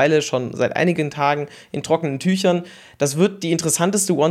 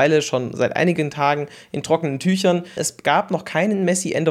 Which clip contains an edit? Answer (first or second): second